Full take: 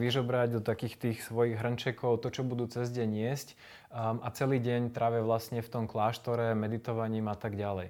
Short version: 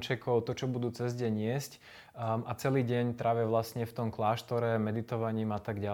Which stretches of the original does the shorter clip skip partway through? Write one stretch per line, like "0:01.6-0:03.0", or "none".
none